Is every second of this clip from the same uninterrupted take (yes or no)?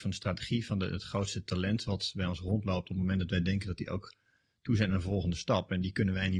yes